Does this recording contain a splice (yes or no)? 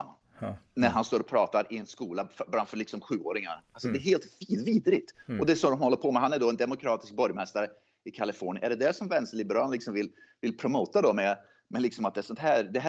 no